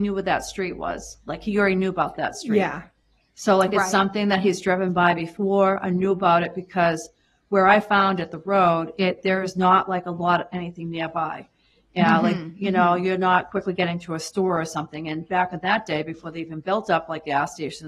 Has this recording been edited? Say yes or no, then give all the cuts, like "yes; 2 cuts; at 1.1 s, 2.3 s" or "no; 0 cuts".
no; 0 cuts